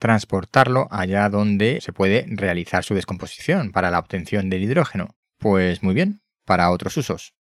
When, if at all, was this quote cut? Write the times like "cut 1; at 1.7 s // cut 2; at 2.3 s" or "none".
cut 1; at 1.8 s // cut 2; at 5.2 s